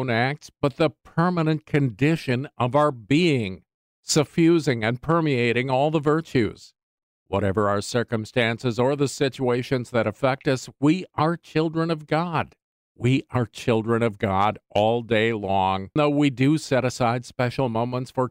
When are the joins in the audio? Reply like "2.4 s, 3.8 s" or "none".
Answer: 12.8 s, 16.0 s